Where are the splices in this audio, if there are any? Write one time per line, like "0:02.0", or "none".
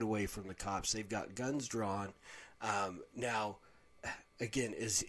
none